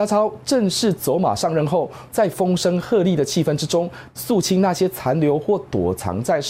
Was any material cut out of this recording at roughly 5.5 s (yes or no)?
no